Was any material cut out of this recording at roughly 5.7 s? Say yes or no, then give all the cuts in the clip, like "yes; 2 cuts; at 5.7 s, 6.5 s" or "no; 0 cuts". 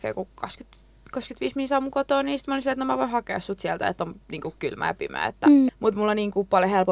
yes; 1 cut; at 5.7 s